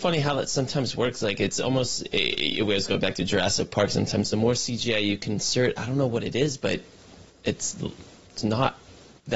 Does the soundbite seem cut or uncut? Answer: uncut